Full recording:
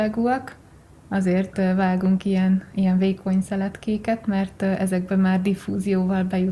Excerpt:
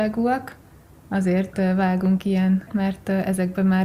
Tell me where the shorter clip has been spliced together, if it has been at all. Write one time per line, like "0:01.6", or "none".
0:02.7